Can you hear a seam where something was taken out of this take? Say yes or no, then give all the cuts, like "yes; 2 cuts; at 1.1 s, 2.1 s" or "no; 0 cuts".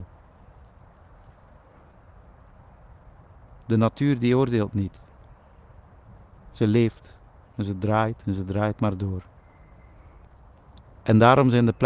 no; 0 cuts